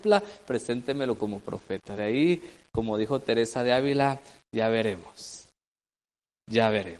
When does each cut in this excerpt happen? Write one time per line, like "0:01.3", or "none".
none